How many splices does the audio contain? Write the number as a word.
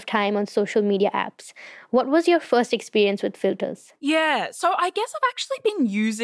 zero